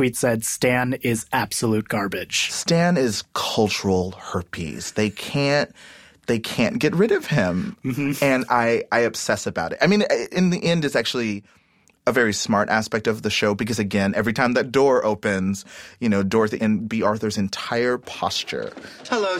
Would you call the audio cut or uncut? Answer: cut